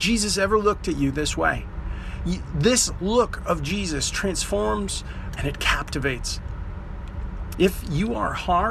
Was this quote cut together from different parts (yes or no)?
yes